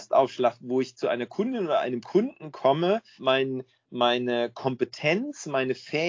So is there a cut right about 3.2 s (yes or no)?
yes